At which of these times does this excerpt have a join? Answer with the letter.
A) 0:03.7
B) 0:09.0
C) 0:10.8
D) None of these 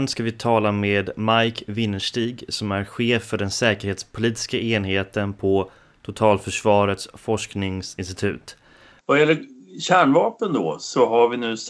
B